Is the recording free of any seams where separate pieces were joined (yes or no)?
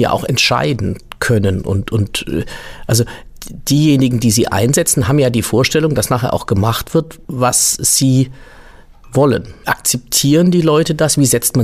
no